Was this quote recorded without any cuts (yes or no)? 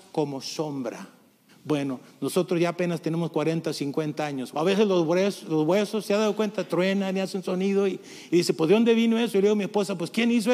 no